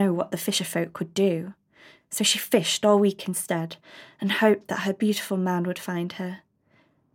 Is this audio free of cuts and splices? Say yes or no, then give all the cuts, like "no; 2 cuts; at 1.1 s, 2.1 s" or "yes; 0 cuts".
yes; 0 cuts